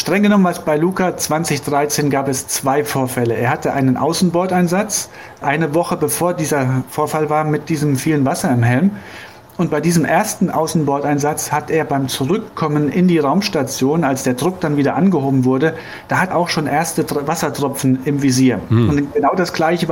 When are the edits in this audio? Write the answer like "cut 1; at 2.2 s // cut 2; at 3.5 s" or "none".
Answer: cut 1; at 16.3 s